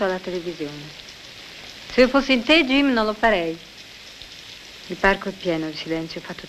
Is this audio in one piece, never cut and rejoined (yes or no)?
no